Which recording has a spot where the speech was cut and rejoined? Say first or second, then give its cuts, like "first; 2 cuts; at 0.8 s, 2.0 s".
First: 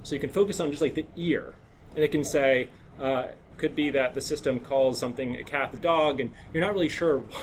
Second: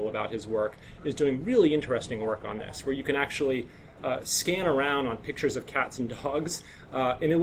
first; 2 cuts; at 3.5 s, 5.8 s